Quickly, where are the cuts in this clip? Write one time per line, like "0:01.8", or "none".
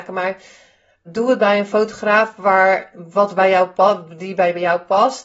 0:01.1